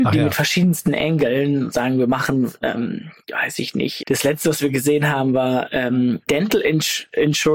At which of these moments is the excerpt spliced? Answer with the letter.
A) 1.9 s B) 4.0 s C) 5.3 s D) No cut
B